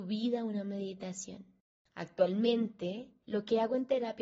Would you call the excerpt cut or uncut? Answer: uncut